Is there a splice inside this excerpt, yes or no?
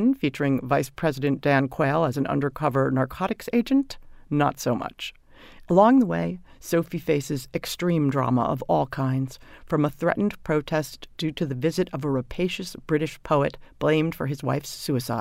yes